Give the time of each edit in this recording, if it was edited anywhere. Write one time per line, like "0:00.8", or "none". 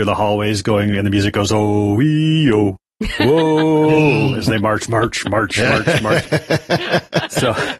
none

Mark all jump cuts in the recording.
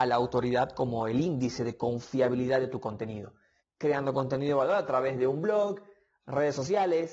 0:03.6

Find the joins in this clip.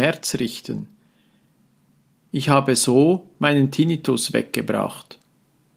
none

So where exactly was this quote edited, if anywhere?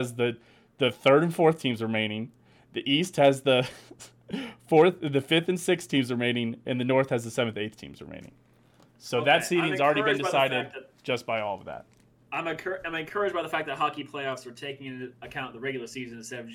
none

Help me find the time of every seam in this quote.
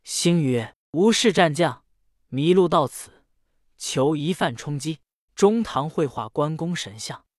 0:05.3

